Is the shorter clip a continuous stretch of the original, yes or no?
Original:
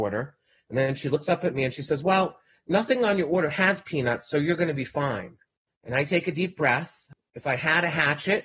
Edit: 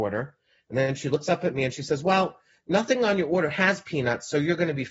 yes